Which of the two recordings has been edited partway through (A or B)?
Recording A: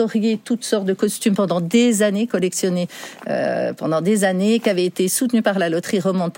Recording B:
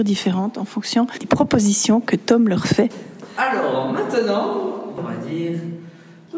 B